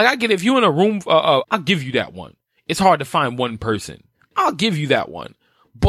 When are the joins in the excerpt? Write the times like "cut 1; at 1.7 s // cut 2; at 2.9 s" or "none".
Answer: cut 1; at 1.4 s